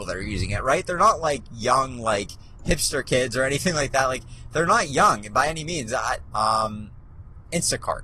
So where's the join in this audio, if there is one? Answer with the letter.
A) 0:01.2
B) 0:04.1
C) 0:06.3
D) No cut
C